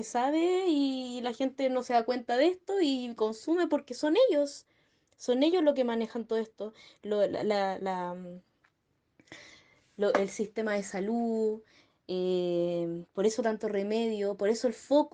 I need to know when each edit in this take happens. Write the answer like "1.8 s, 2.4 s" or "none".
none